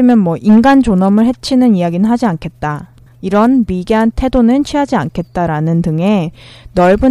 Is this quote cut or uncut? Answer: cut